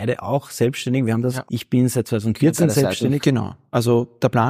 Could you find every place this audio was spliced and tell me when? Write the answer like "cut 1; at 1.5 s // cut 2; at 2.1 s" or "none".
cut 1; at 1.5 s // cut 2; at 3.2 s